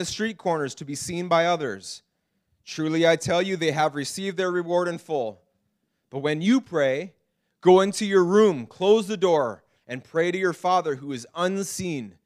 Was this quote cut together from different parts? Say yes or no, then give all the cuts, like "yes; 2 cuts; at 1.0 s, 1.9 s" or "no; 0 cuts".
no; 0 cuts